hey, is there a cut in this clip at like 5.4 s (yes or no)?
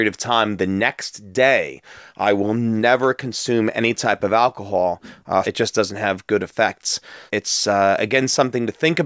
yes